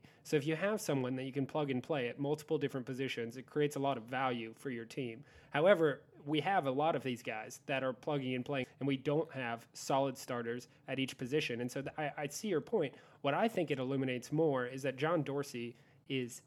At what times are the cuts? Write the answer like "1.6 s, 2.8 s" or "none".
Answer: 8.6 s